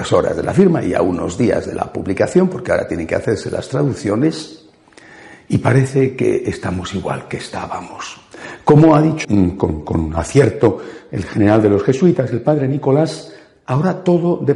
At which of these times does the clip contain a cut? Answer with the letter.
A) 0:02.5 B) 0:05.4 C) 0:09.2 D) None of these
C